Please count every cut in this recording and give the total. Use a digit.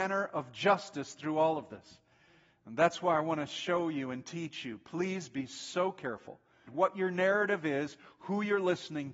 1